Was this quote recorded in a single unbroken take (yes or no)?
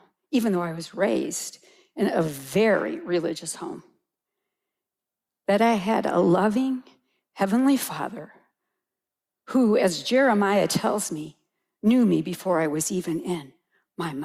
yes